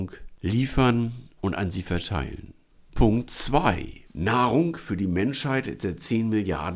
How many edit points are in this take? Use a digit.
2